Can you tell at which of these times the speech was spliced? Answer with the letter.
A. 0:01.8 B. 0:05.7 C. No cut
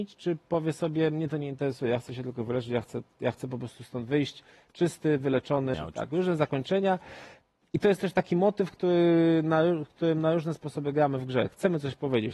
B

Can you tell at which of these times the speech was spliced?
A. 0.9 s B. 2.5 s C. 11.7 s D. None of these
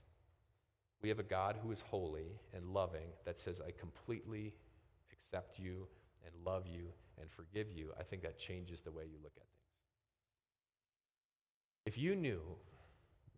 D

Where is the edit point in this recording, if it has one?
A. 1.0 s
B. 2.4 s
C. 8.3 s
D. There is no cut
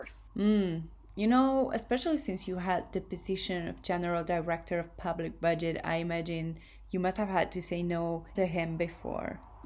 C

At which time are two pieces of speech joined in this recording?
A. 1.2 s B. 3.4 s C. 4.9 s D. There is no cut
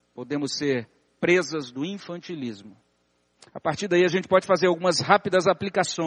B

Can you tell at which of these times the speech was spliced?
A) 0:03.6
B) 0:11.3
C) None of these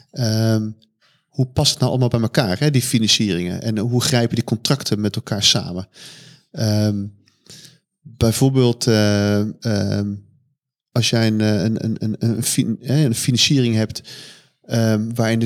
C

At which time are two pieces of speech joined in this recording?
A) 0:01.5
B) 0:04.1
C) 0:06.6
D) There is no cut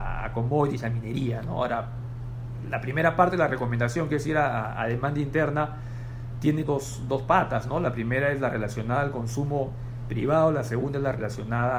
C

